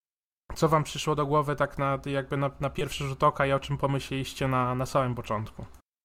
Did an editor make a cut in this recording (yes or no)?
no